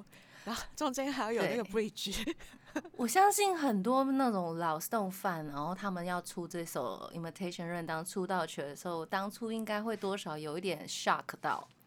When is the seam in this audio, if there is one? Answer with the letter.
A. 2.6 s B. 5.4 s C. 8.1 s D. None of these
D